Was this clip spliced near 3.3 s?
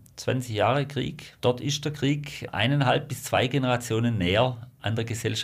no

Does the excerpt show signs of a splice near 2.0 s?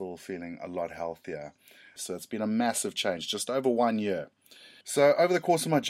yes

